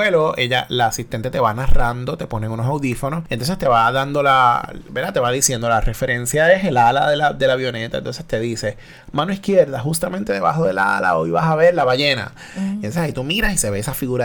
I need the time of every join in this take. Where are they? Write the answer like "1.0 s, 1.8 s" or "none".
none